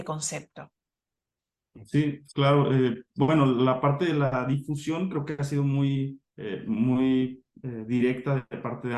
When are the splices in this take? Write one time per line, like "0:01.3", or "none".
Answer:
none

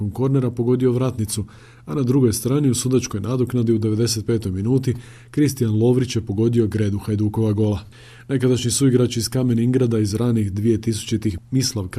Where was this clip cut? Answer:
none

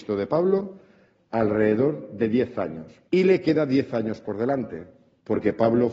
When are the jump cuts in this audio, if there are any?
0:01.1
0:03.1

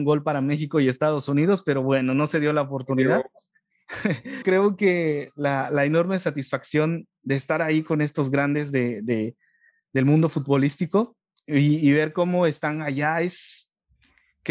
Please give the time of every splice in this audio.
0:04.4

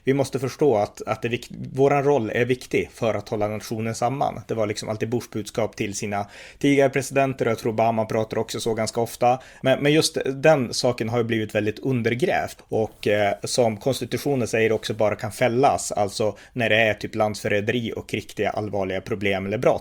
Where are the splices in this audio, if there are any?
0:09.6
0:12.6

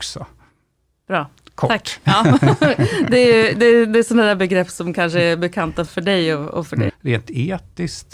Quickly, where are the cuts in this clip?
0:05.9
0:06.9

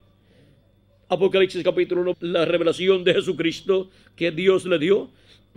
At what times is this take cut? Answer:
0:02.1

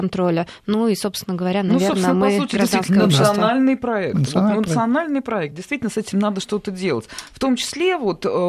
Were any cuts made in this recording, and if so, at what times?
none

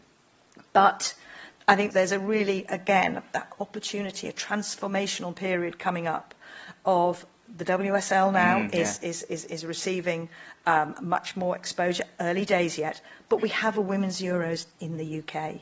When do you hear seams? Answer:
0:01.9

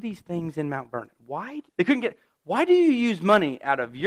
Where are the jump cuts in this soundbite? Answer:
0:01.7

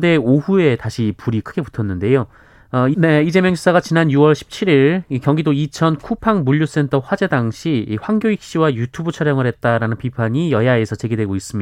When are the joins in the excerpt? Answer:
0:02.9

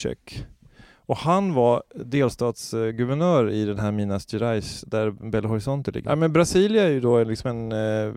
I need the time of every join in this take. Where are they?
0:06.0

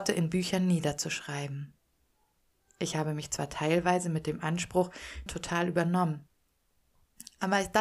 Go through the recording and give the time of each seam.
0:05.3

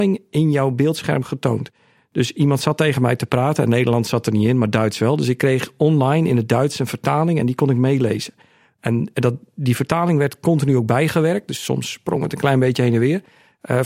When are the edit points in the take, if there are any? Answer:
none

